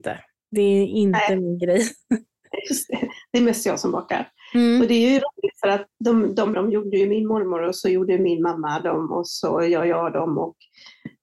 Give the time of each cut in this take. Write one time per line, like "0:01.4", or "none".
0:06.5